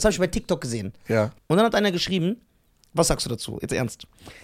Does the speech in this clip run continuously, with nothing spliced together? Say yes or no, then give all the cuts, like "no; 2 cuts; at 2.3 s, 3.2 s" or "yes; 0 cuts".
no; 1 cut; at 1.4 s